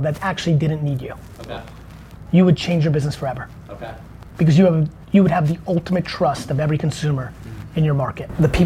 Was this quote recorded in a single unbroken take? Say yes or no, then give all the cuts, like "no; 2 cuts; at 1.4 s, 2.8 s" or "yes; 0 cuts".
yes; 0 cuts